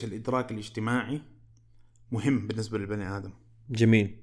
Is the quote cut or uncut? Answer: uncut